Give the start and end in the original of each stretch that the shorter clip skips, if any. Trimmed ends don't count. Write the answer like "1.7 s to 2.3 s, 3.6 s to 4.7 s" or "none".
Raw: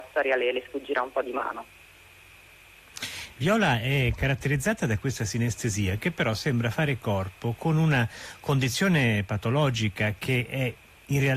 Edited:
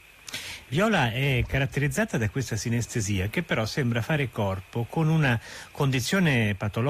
none